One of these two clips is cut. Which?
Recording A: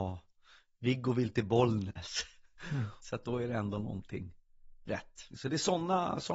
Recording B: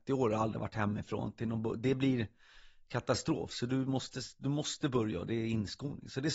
A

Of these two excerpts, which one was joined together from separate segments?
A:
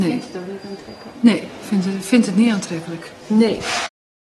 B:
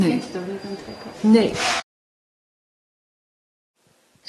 B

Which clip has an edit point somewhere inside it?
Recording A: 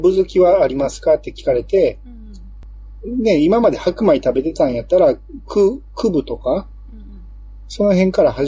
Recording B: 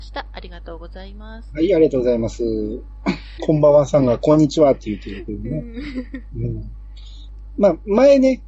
B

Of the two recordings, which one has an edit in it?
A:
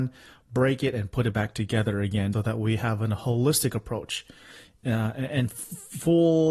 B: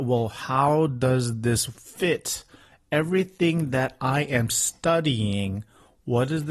A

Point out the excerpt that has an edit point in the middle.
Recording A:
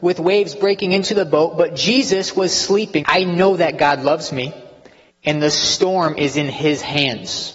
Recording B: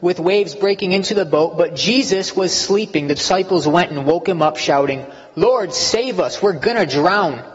A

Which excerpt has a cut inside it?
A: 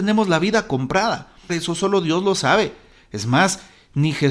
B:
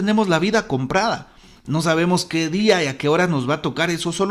A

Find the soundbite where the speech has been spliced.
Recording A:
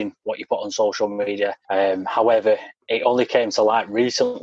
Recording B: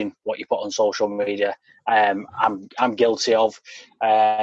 A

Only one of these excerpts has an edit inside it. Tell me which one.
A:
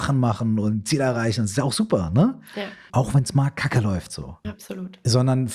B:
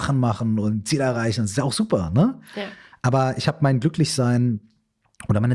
A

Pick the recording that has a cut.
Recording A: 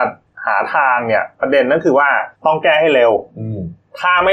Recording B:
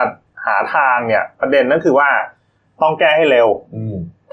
A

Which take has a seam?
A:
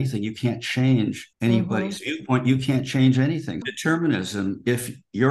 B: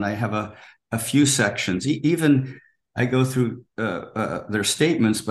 A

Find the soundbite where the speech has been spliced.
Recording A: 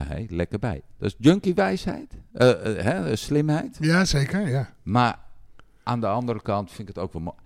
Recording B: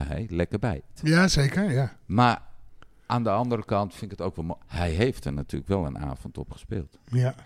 B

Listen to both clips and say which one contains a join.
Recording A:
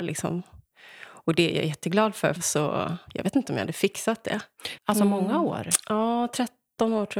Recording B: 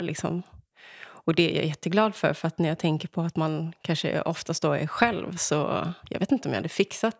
A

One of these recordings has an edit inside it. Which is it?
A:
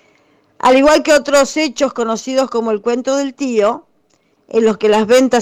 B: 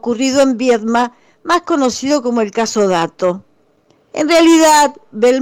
B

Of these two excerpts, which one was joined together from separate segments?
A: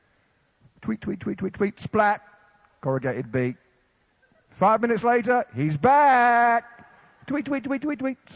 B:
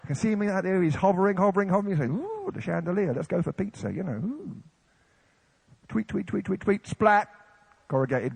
B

